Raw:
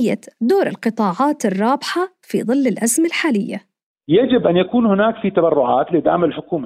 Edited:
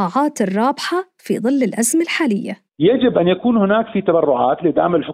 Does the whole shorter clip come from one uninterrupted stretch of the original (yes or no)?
no